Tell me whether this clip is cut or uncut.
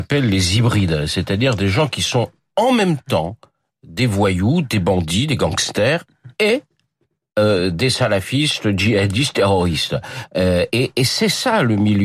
uncut